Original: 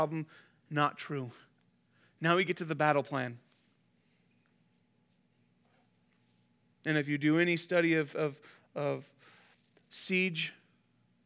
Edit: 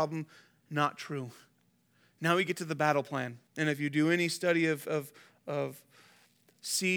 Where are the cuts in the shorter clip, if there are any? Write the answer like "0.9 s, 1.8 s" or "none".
3.5 s